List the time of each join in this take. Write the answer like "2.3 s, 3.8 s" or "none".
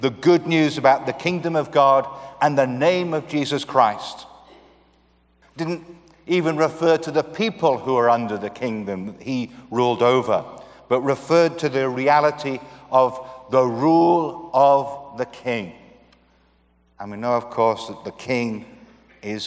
5.4 s